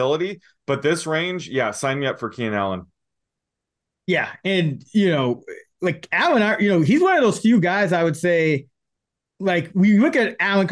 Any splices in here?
no; 0 cuts

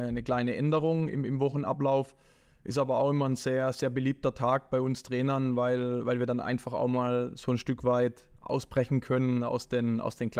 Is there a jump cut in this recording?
no; 0 cuts

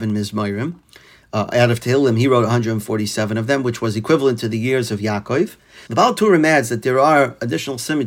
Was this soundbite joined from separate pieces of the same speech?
yes; 1 cut; at 5.9 s

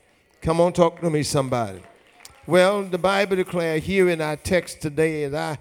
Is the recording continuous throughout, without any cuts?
yes; 0 cuts

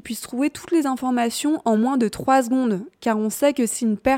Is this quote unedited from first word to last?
yes; 0 cuts

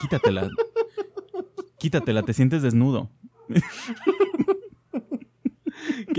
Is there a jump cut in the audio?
no; 0 cuts

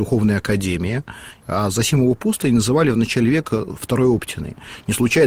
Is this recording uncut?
no; 1 cut; at 1.4 s

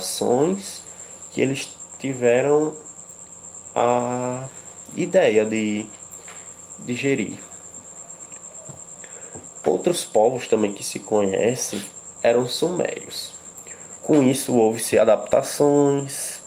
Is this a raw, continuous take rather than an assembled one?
no; 2 cuts; at 12.1 s, 14.0 s

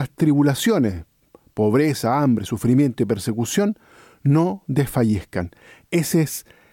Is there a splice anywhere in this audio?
no; 0 cuts

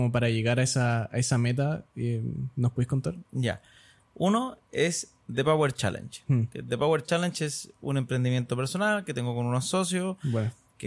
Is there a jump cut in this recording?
no; 0 cuts

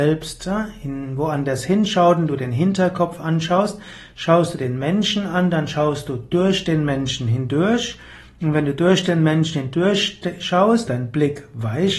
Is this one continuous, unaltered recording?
no; 1 cut; at 10.9 s

